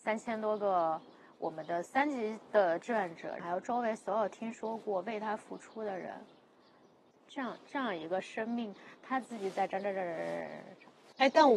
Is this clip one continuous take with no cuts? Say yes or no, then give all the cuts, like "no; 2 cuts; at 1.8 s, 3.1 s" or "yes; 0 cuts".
no; 2 cuts; at 3.4 s, 7.1 s